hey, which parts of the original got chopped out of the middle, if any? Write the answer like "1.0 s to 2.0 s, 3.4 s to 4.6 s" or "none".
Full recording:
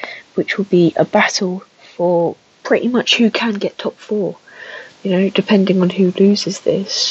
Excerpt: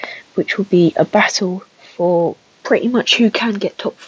none